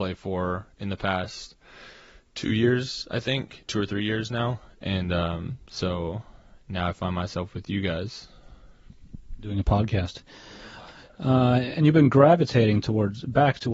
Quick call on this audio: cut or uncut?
uncut